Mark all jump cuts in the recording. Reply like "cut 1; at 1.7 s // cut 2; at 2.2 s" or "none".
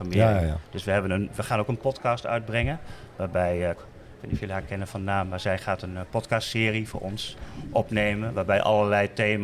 cut 1; at 3.8 s